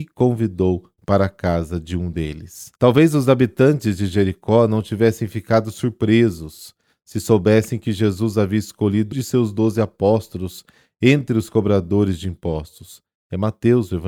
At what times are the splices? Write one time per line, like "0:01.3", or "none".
0:02.8
0:09.1